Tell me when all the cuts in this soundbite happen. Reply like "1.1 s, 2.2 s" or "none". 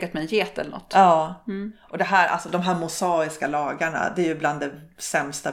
none